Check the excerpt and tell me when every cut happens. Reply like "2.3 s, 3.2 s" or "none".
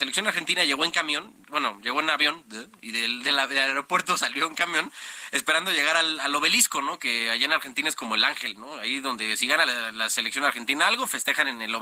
none